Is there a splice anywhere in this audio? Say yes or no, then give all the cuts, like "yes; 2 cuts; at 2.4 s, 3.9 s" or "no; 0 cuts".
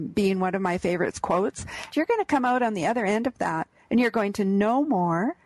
yes; 1 cut; at 1.9 s